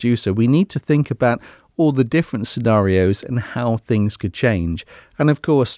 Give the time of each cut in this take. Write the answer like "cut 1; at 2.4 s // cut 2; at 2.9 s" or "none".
none